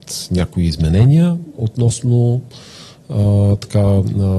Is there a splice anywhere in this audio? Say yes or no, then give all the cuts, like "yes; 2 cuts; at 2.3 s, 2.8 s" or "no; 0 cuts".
no; 0 cuts